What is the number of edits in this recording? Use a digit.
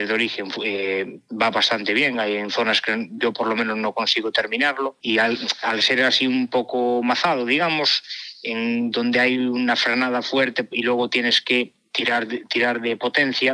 0